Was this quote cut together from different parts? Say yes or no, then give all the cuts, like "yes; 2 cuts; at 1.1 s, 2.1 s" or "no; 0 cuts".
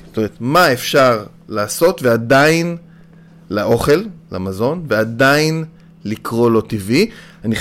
no; 0 cuts